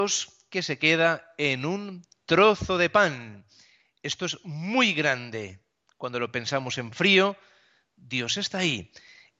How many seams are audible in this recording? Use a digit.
0